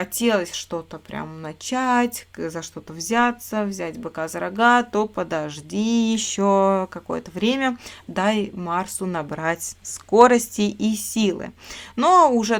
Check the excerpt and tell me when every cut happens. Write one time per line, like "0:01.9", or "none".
none